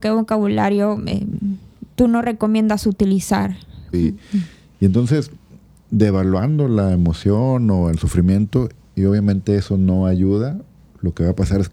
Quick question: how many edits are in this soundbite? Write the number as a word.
one